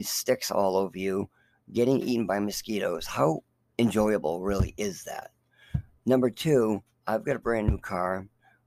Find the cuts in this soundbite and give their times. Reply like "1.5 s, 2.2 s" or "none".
none